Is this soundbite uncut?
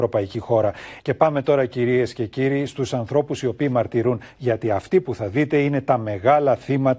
no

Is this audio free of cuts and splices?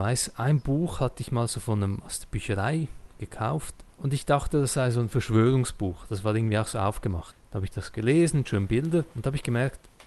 yes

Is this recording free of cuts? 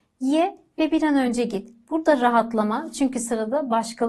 yes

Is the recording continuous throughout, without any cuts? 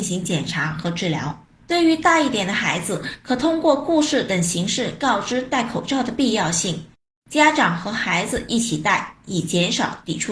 no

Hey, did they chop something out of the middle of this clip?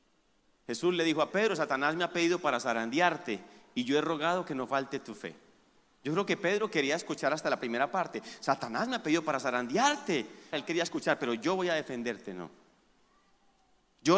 yes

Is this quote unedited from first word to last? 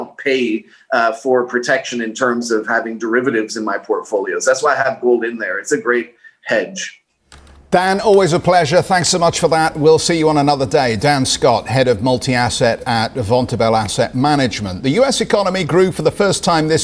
yes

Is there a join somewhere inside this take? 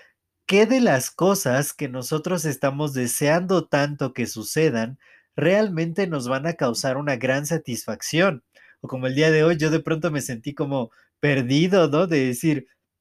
no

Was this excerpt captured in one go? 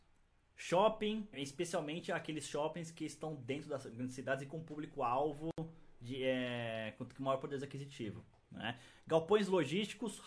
no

